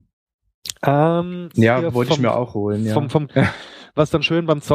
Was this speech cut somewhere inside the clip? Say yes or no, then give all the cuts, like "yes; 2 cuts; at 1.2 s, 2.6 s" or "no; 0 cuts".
yes; 2 cuts; at 1.5 s, 3.3 s